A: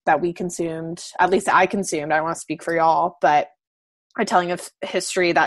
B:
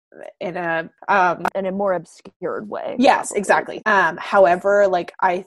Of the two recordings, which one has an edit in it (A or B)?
B